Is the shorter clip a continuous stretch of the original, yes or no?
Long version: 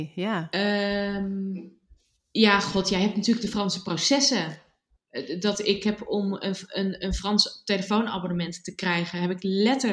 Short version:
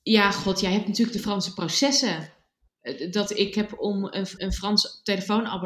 no